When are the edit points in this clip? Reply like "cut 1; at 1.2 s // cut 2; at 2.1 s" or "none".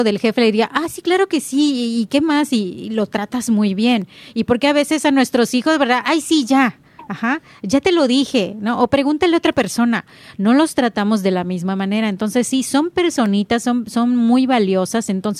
none